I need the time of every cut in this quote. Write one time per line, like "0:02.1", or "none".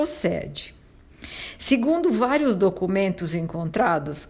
none